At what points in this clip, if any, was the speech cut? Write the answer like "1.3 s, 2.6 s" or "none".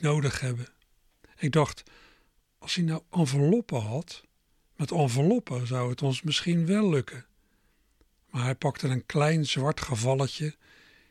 none